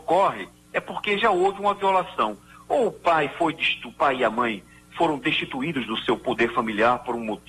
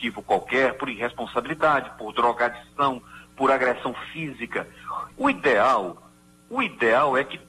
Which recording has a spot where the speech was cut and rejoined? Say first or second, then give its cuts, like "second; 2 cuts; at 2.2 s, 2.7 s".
second; 1 cut; at 5.1 s